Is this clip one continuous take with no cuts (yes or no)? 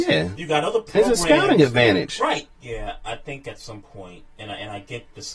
no